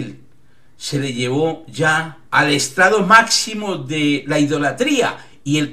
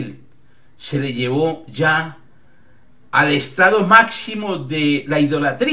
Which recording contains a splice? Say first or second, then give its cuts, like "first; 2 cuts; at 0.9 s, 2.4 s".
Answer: first; 1 cut; at 2.3 s